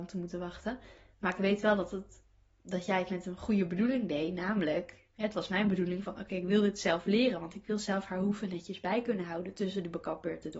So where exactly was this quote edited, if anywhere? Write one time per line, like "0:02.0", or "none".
none

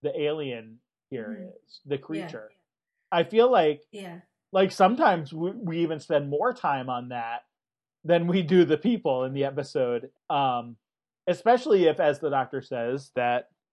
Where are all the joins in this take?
0:10.1

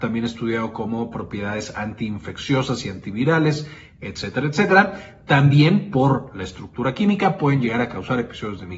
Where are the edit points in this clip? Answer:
none

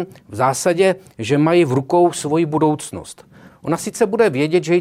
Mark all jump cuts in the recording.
0:03.5

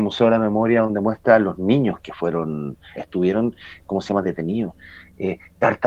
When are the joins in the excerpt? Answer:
0:02.9
0:04.2

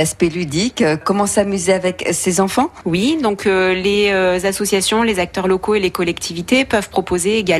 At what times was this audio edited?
none

